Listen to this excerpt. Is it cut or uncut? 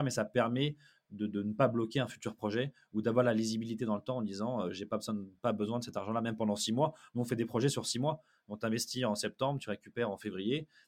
uncut